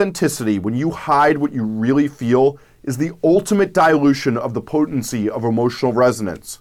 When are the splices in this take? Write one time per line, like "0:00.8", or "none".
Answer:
none